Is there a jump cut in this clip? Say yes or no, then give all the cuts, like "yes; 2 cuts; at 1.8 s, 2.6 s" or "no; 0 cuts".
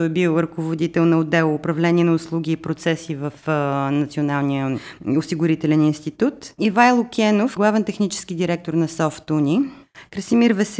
yes; 1 cut; at 7.6 s